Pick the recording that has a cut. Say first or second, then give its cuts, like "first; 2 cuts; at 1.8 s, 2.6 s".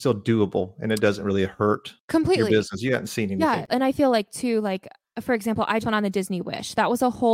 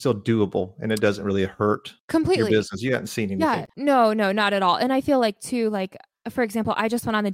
first; 2 cuts; at 3.7 s, 5.8 s